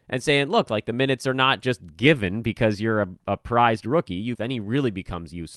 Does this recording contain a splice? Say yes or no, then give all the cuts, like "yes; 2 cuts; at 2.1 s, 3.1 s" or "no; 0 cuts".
yes; 1 cut; at 4.3 s